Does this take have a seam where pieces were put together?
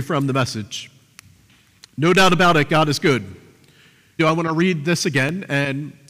yes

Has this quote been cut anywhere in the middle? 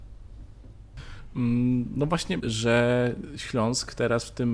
yes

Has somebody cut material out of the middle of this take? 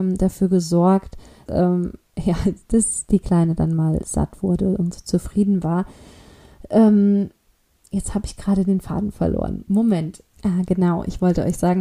yes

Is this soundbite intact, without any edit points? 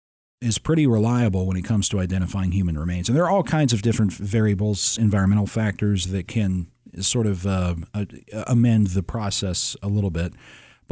yes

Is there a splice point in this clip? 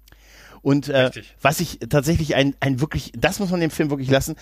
no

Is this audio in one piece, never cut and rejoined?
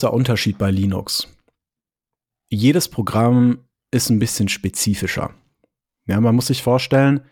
yes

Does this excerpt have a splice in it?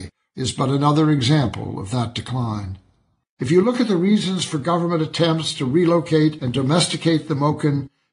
yes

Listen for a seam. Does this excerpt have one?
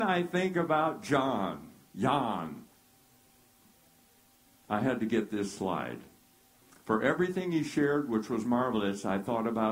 no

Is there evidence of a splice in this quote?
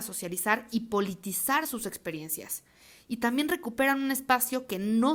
no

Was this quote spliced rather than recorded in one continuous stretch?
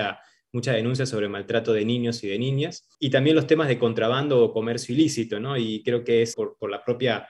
yes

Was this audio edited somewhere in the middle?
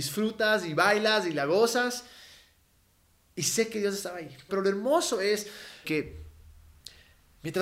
yes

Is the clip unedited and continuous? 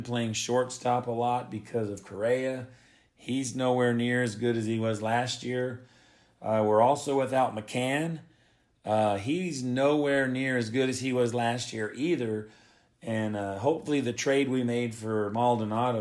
yes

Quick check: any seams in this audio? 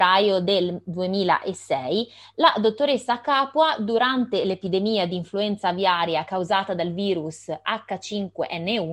no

